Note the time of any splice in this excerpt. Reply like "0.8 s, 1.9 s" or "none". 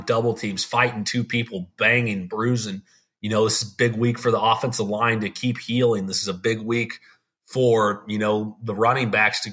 none